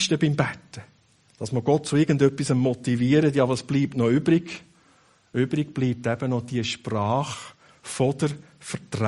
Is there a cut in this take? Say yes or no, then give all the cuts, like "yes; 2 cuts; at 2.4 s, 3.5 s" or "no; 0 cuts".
no; 0 cuts